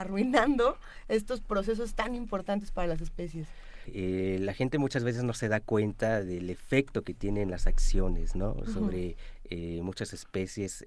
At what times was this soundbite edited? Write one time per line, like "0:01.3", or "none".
0:03.9